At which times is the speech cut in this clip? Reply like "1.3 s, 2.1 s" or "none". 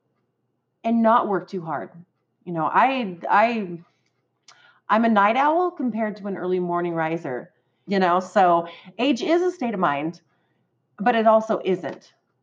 7.9 s